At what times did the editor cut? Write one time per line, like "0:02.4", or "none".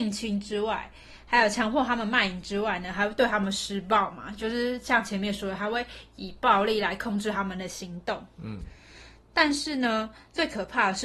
none